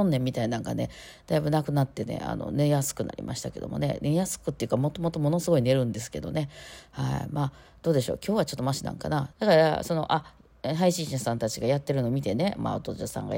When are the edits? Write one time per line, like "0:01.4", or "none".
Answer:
0:09.3